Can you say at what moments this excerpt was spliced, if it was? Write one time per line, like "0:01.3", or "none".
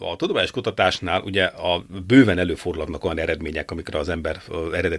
none